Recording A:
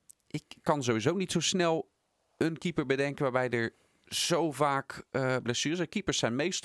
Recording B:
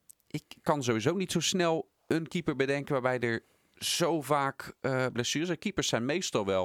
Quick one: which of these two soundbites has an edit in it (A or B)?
B